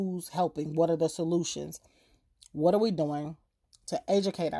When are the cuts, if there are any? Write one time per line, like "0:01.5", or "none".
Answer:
none